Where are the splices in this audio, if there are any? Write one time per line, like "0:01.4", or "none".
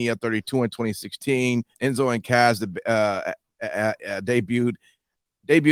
0:01.7